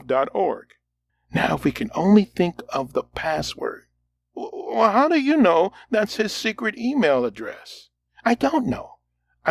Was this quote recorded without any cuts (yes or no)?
yes